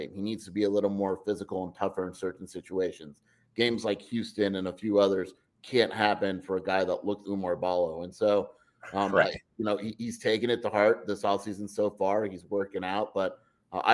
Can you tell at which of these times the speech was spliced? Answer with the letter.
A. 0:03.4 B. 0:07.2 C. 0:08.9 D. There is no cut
B